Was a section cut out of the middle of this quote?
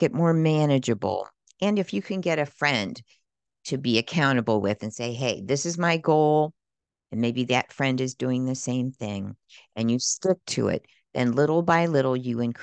no; 0 cuts

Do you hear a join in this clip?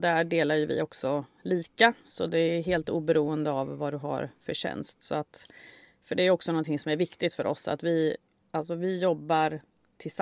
no; 0 cuts

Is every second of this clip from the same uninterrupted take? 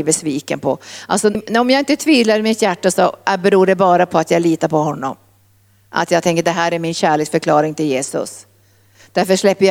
no; 1 cut; at 1.3 s

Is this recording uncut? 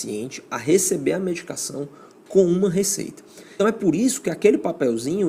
no; 1 cut; at 3.6 s

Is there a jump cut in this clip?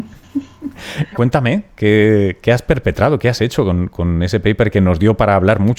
yes; 1 cut; at 1.1 s

